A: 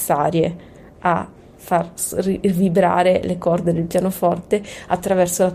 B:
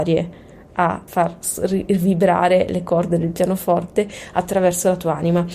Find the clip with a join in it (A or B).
B